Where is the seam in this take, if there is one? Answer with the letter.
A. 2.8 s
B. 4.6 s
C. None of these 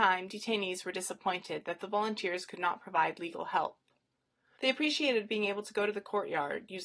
B